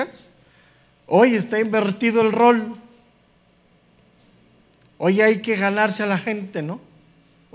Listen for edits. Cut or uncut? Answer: uncut